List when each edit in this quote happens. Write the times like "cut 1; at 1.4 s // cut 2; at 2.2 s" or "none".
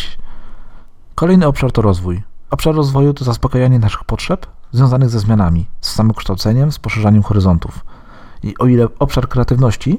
none